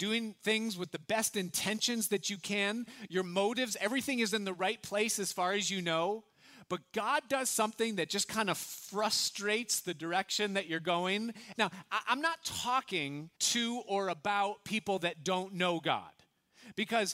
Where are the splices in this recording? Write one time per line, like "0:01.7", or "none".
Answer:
0:11.5
0:13.3